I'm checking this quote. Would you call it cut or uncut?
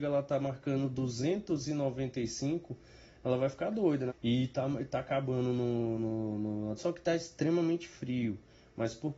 cut